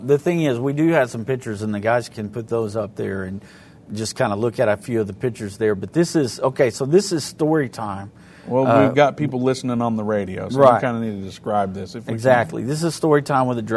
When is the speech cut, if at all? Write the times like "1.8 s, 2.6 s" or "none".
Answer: 2.1 s